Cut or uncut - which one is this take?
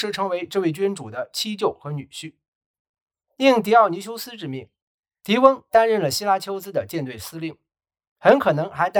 uncut